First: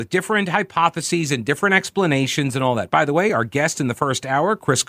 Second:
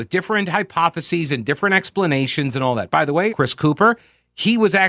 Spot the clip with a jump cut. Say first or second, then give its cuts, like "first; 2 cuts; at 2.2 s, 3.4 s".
second; 1 cut; at 3.3 s